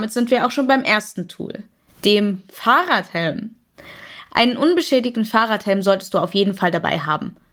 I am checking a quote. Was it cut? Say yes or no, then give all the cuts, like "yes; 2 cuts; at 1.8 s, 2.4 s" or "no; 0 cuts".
no; 0 cuts